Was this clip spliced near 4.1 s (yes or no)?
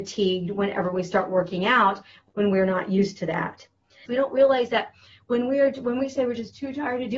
yes